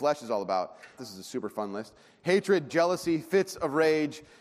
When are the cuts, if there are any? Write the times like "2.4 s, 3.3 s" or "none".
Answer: 1.0 s, 2.7 s